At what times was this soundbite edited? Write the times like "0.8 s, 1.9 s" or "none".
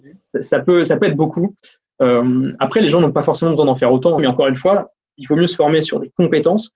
4.2 s